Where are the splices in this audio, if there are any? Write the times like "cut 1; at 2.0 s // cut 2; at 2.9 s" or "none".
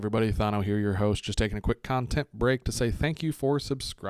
none